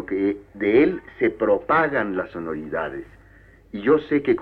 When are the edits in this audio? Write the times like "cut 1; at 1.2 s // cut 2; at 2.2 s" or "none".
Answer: none